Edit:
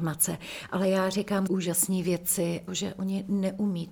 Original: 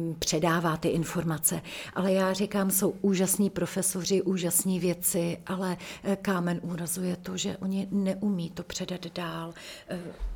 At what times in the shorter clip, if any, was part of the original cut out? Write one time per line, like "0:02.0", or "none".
0:01.5
0:02.7